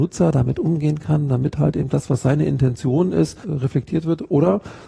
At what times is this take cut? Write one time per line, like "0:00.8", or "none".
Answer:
0:03.4